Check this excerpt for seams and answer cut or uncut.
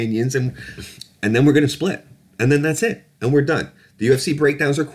uncut